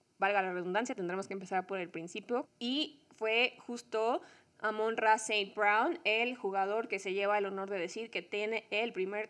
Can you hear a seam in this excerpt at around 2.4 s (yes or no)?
yes